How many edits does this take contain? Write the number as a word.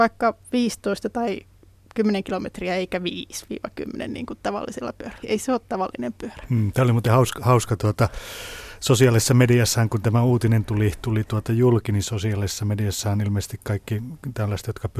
one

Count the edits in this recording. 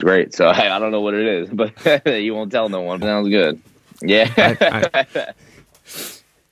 one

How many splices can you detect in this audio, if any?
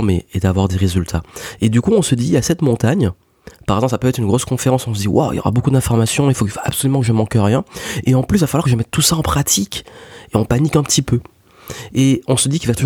one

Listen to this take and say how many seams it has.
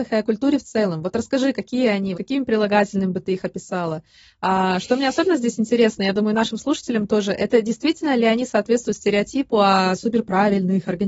one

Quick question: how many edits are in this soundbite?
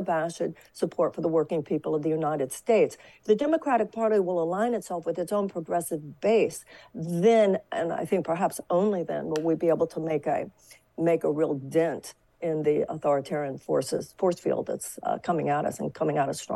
one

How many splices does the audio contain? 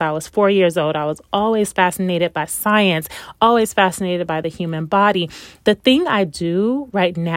zero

